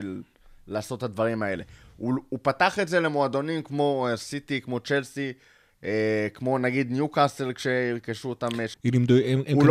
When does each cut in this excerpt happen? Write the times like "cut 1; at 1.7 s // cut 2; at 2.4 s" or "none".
cut 1; at 8.7 s